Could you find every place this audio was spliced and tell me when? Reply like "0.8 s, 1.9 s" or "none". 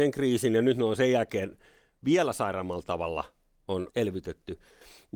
3.9 s